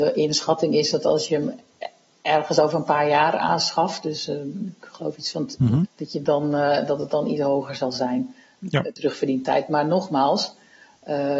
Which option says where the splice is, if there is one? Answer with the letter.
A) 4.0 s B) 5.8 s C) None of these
B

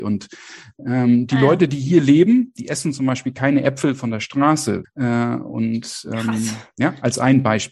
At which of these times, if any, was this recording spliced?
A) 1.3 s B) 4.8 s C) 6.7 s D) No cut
B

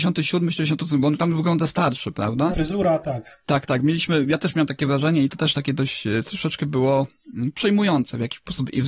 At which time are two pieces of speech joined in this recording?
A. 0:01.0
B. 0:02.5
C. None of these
B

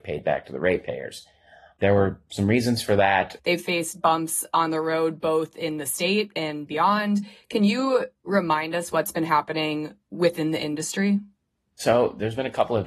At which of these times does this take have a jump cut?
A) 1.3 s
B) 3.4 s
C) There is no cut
B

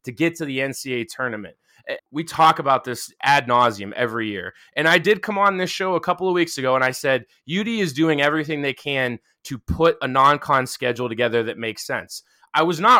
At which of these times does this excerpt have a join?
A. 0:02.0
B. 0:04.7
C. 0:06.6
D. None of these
A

